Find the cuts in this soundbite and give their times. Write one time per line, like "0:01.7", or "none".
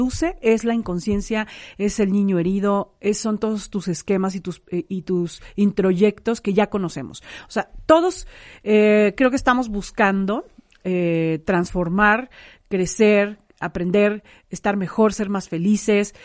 none